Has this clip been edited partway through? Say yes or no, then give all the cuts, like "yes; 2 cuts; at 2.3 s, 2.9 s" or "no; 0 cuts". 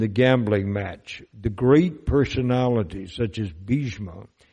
no; 0 cuts